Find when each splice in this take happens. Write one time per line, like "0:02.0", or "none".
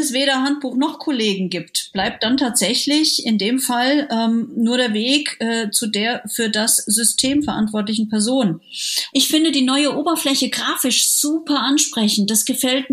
0:09.1